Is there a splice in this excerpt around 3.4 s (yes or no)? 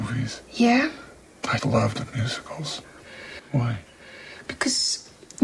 yes